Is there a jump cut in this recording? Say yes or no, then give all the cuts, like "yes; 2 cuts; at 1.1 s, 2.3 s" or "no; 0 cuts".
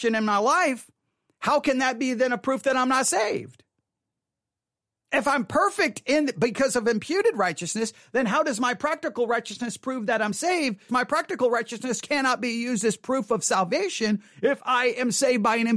yes; 1 cut; at 10.9 s